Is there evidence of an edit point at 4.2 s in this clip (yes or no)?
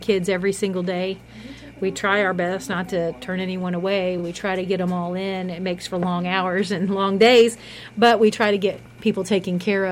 no